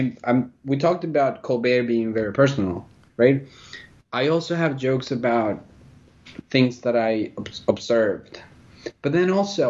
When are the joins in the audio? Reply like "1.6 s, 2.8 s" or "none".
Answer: 3.1 s

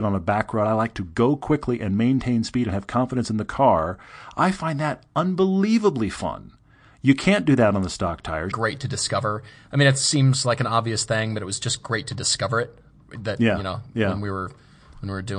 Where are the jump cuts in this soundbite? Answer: 8.5 s

